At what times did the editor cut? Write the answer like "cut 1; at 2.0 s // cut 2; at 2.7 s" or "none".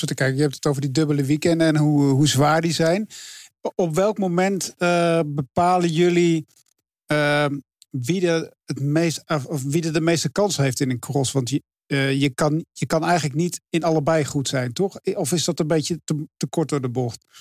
none